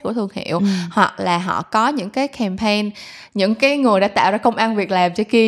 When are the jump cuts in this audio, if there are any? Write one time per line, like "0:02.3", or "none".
none